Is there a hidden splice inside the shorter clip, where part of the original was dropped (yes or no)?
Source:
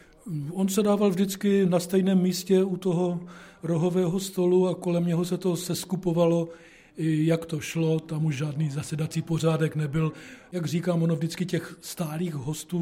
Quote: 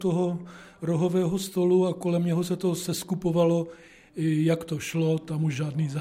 no